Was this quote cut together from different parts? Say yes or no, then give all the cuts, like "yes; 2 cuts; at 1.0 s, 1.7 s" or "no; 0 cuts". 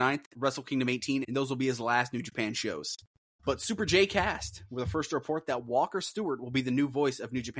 yes; 2 cuts; at 1.2 s, 3.4 s